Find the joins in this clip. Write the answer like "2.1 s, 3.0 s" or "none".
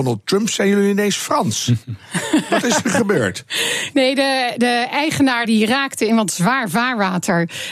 3.9 s, 5.4 s